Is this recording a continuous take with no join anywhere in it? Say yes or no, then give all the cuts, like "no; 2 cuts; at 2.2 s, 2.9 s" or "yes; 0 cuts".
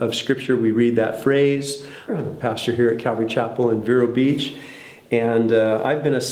no; 1 cut; at 2.1 s